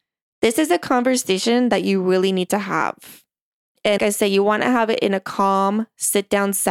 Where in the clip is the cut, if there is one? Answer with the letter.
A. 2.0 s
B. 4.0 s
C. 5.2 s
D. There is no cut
B